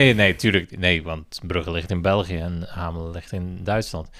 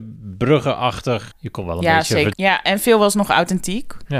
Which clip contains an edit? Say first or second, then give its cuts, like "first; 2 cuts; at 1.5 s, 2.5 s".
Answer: second; 2 cuts; at 1.3 s, 2.3 s